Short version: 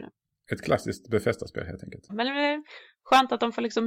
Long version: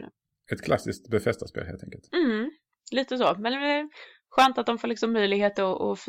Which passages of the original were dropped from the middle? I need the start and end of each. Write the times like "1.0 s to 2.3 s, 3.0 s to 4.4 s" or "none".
2.1 s to 3.4 s